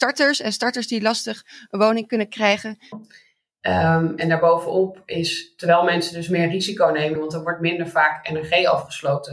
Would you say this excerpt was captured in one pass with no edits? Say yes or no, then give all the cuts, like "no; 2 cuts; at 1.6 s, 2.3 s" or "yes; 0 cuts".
no; 2 cuts; at 2.9 s, 7.2 s